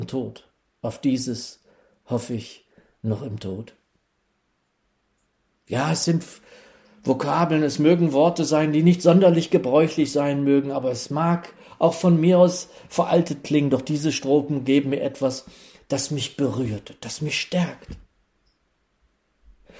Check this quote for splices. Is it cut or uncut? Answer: uncut